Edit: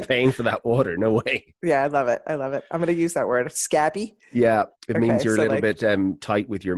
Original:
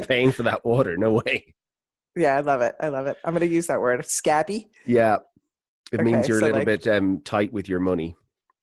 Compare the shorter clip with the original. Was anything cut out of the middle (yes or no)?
yes